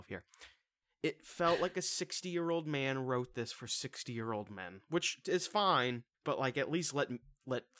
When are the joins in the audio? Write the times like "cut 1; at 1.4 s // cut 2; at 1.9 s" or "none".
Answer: cut 1; at 6.1 s